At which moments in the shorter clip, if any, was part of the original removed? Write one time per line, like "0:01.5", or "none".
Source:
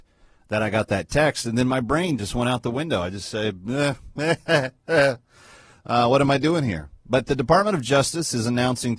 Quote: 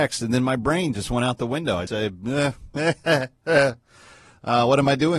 0:01.9